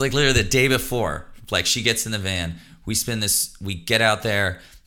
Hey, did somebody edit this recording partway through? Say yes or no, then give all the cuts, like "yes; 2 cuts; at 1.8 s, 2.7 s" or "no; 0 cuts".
no; 0 cuts